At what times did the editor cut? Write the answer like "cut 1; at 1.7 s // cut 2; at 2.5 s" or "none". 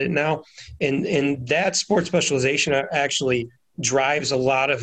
none